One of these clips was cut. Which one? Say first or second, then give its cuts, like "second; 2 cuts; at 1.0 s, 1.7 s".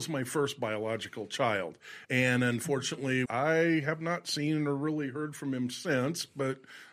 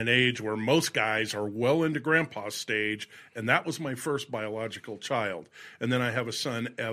first; 2 cuts; at 2.0 s, 3.2 s